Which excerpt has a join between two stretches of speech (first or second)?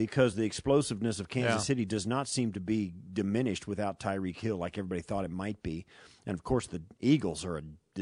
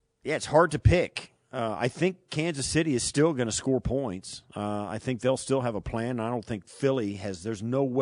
second